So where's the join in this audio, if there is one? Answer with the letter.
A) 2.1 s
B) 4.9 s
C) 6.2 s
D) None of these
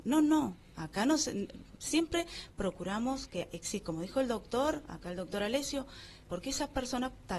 C